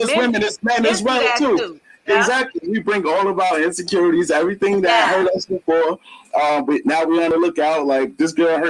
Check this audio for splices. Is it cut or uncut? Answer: uncut